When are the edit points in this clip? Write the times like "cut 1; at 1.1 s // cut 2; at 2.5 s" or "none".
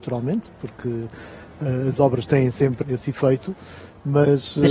cut 1; at 2.8 s

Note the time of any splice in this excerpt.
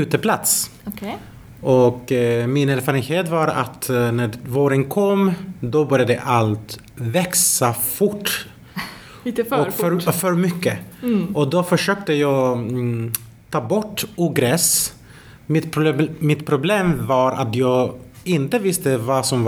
none

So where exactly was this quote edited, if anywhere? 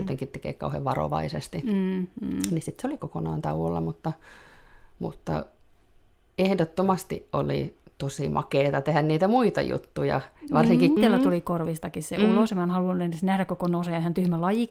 cut 1; at 11.0 s

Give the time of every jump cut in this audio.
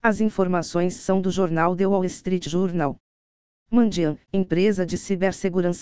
none

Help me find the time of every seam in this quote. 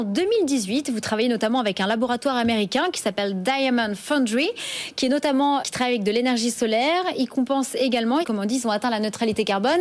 cut 1; at 5.6 s // cut 2; at 8.2 s

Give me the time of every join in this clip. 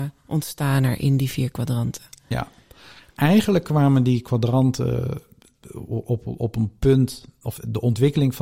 none

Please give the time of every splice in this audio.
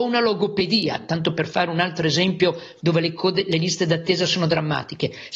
none

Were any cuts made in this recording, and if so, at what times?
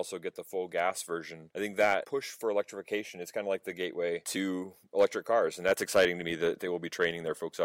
none

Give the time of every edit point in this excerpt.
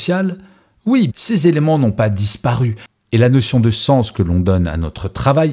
cut 1; at 1.1 s

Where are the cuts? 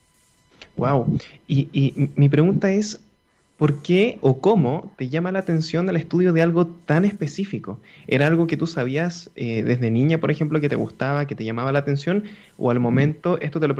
none

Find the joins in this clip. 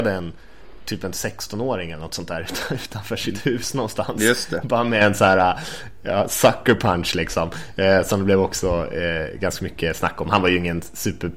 none

